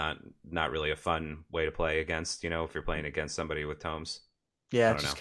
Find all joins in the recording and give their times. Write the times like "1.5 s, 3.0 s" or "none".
none